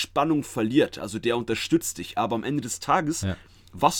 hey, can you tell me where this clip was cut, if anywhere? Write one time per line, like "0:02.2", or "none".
none